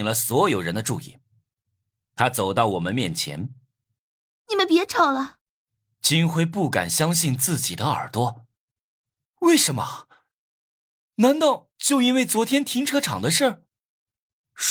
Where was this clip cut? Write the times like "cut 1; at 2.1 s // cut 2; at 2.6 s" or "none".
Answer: cut 1; at 5.4 s